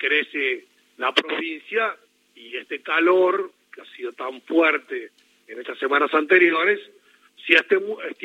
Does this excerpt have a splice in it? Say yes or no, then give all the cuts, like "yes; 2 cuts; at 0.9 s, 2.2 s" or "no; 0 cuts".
no; 0 cuts